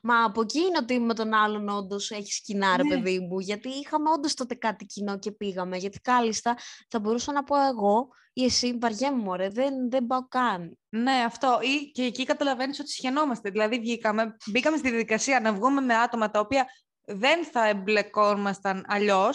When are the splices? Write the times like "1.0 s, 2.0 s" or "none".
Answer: none